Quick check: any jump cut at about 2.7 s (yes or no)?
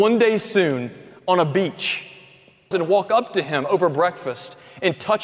yes